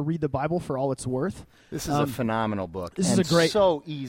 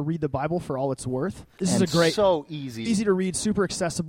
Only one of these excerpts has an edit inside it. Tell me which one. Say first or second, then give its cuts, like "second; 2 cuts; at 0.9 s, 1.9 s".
second; 2 cuts; at 1.6 s, 2.9 s